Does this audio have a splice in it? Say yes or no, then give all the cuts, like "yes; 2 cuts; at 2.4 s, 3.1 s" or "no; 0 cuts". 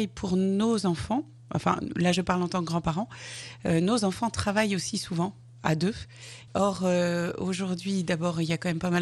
yes; 1 cut; at 6.5 s